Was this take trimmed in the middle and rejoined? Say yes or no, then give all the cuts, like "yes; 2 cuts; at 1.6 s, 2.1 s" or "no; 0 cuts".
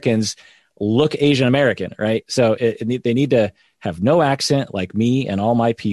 no; 0 cuts